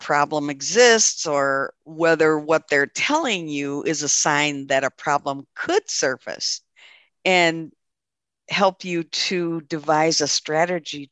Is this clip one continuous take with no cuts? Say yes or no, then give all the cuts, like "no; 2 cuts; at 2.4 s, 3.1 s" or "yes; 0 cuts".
no; 1 cut; at 1.8 s